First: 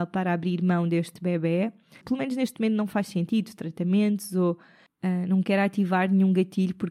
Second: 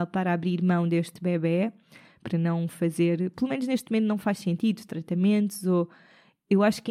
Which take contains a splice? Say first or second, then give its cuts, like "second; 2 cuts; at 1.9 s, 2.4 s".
first; 2 cuts; at 2.0 s, 4.9 s